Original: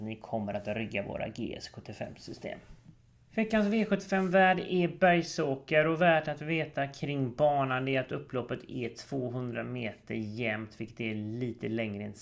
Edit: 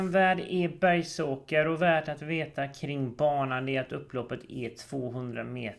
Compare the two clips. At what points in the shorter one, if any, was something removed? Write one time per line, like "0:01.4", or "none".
none